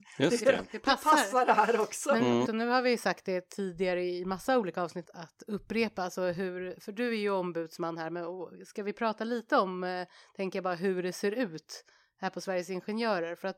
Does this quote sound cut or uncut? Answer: cut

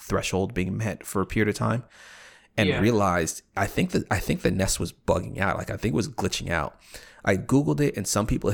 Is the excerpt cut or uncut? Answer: uncut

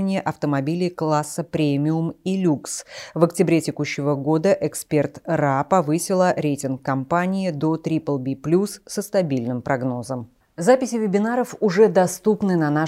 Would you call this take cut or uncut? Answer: uncut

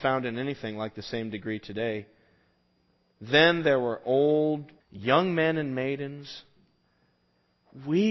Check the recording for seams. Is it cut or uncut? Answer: cut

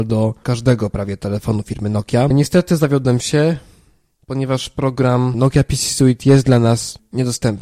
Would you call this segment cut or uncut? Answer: uncut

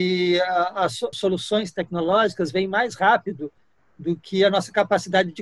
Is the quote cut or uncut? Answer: cut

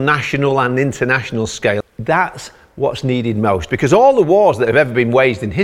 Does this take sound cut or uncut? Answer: cut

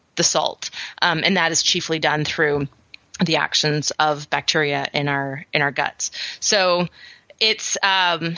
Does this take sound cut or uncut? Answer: uncut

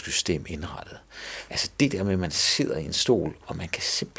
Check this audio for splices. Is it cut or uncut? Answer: cut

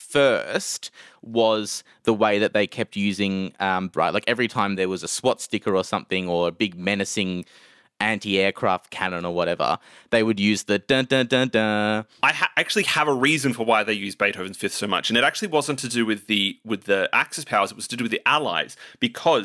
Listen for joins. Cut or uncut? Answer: cut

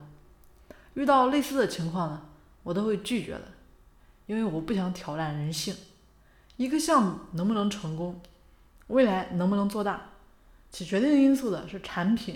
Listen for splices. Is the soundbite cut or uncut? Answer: uncut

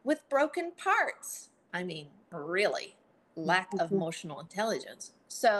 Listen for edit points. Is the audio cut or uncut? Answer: cut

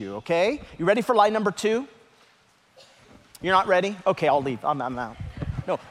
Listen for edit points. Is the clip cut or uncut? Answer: uncut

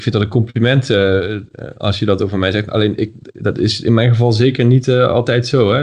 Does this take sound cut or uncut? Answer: uncut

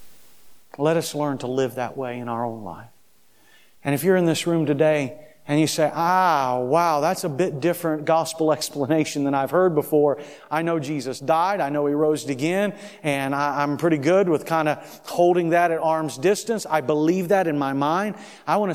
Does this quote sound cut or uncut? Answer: uncut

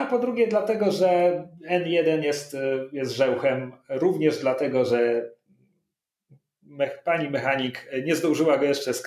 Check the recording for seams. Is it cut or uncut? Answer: uncut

